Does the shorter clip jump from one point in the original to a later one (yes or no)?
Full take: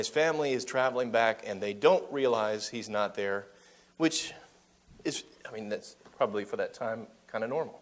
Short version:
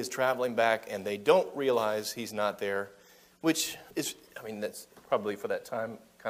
yes